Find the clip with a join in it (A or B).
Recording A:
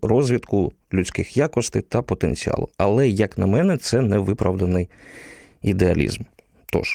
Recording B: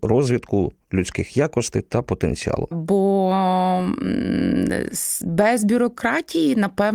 B